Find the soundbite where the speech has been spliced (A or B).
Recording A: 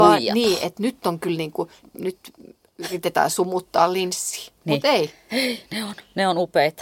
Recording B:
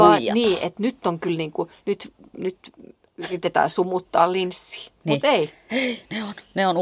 A